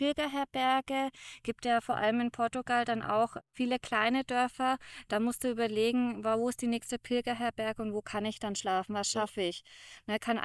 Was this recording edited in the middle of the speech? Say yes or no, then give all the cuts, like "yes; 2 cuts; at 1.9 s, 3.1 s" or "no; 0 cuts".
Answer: no; 0 cuts